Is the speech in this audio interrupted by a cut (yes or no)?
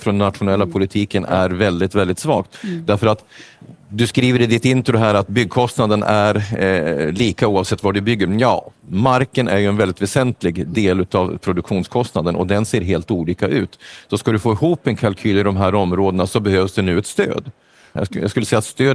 yes